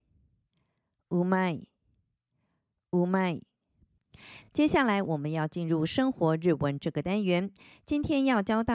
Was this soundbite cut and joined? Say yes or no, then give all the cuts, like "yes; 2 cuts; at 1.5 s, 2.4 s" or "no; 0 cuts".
no; 0 cuts